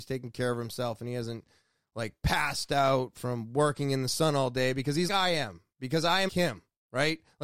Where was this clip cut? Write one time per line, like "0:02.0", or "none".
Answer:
0:05.1
0:06.3